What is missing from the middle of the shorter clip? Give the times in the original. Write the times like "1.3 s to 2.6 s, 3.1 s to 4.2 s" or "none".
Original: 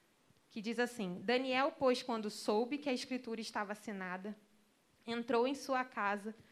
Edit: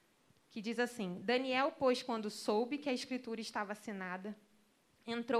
none

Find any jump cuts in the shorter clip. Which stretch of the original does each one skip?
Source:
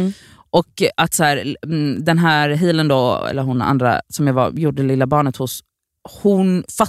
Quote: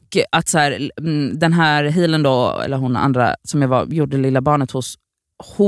none

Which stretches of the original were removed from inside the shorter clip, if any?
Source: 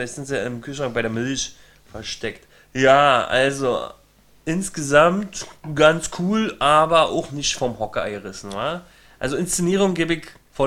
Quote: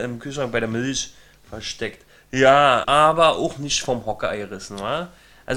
3.3 s to 6.6 s

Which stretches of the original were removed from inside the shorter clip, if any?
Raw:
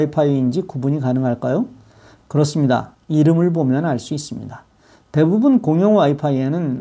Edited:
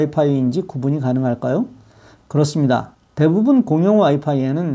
3.1 s to 5.0 s

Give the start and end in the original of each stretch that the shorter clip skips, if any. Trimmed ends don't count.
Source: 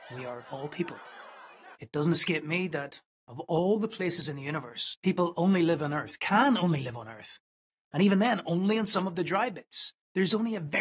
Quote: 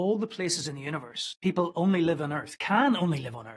none

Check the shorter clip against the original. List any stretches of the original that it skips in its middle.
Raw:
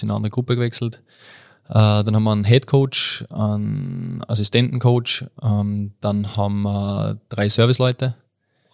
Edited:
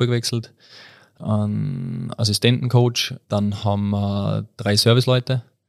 1.7 s to 3.3 s, 5.3 s to 6.0 s

